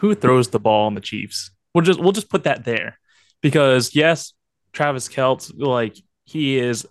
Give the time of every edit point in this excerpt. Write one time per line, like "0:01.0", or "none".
0:01.7